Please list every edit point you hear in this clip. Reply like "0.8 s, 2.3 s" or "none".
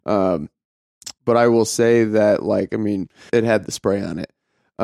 1.2 s, 3.3 s